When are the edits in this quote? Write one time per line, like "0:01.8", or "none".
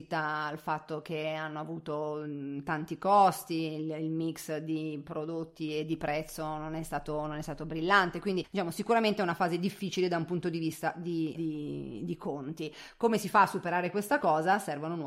0:11.3